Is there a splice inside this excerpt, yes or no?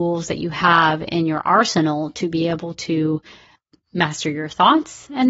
no